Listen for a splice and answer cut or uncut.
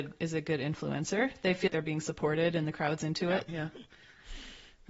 cut